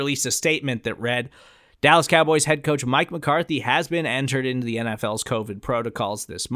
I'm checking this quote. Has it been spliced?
no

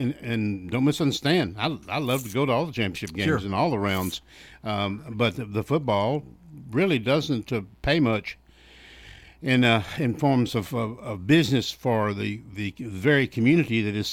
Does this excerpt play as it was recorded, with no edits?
yes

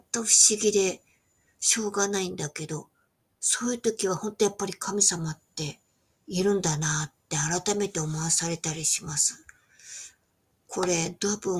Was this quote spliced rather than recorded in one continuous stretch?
no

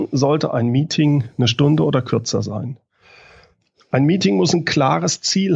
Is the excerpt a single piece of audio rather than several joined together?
yes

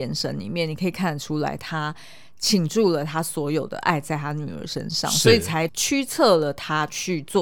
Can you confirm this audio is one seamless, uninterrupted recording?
no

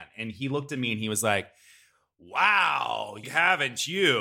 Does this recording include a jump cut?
yes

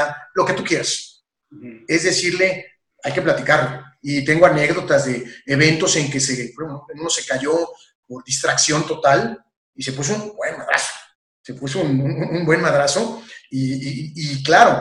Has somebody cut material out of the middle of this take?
yes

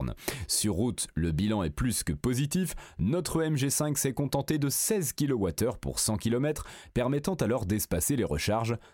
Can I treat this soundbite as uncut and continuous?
yes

